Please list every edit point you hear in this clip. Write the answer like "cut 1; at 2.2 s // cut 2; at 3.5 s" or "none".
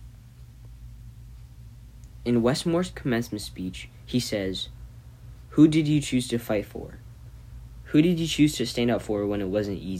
none